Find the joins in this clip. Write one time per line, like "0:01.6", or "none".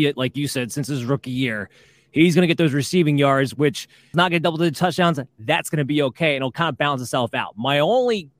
0:04.1